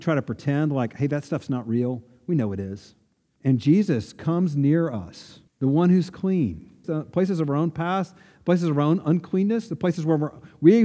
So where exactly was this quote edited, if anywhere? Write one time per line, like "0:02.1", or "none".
0:03.4
0:05.5
0:06.8